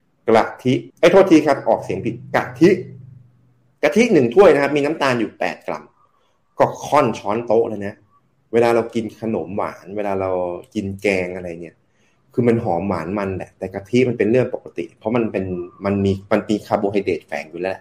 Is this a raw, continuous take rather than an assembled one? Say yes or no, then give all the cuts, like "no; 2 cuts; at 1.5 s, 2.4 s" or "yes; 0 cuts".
no; 1 cut; at 0.9 s